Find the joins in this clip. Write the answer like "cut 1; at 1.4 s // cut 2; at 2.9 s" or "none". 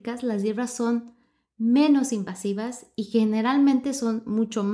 none